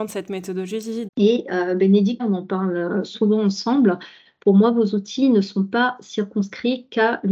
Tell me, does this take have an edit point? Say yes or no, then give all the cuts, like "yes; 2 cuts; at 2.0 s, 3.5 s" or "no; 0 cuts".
yes; 2 cuts; at 1.1 s, 2.2 s